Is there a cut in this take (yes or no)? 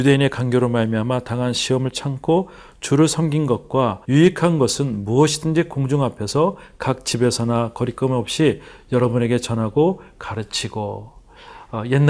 yes